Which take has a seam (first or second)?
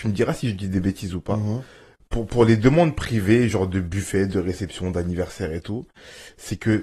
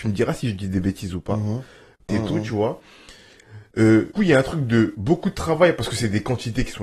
second